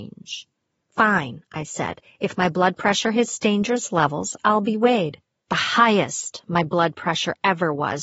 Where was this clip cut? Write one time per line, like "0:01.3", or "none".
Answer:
0:05.4